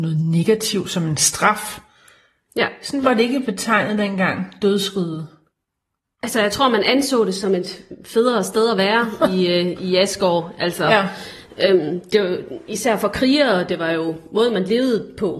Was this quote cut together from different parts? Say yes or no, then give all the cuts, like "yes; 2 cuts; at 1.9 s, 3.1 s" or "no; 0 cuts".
no; 0 cuts